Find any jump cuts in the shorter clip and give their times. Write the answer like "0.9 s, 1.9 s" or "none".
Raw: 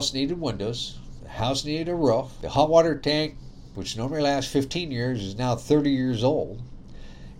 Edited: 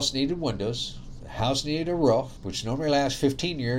2.4 s